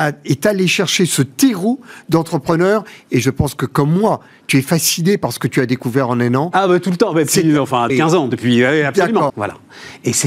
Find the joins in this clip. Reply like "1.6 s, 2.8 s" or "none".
7.9 s, 9.3 s

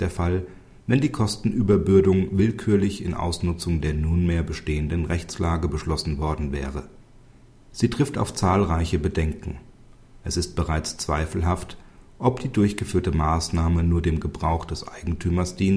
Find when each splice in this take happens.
7.6 s

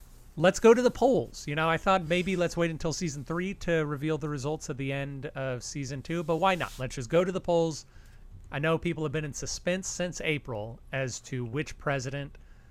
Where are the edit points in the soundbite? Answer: none

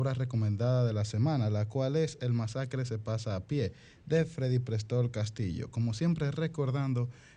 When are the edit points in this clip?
none

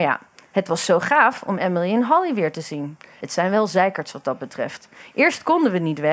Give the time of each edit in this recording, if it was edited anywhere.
3.2 s

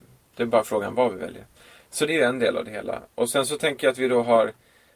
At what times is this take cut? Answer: 2.1 s

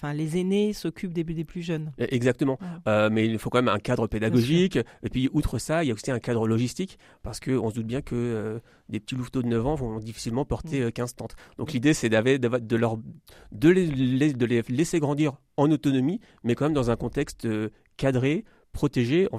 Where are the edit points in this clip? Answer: none

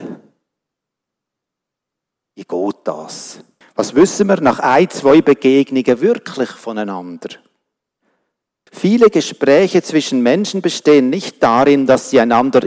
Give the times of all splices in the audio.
3.6 s, 8.7 s

